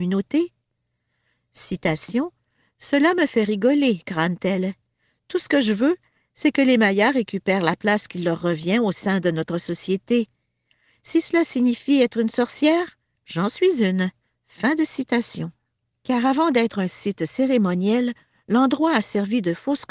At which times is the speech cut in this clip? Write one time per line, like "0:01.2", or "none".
0:13.1
0:15.9